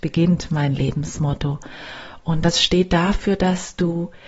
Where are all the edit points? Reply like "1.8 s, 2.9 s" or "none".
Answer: none